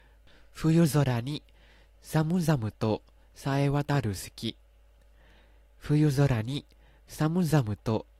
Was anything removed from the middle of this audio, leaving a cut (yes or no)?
no